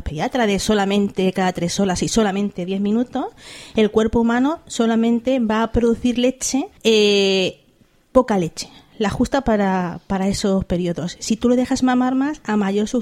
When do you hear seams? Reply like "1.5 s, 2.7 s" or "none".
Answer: 6.8 s